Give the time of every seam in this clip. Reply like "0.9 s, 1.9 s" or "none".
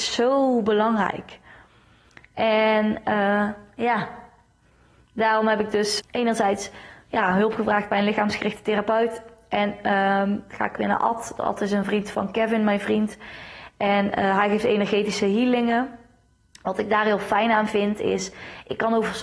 6.0 s